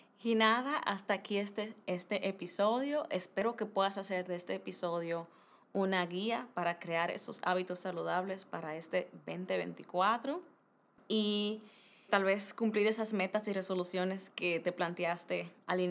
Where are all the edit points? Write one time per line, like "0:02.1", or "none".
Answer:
0:12.1